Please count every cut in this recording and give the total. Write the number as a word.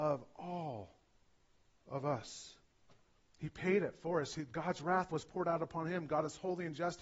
zero